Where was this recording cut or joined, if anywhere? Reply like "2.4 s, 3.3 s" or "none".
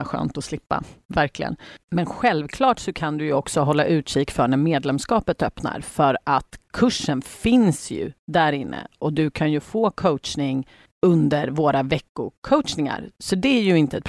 none